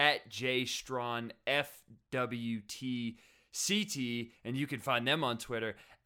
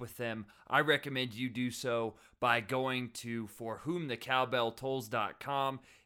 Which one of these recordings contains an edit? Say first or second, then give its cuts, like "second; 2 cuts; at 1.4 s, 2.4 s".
first; 1 cut; at 4.4 s